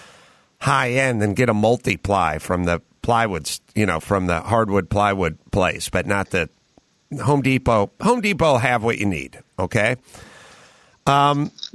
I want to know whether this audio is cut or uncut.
uncut